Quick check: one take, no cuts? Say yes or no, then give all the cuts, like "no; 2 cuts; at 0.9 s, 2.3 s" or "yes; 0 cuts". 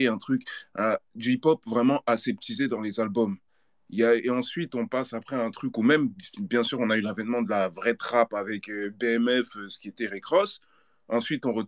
yes; 0 cuts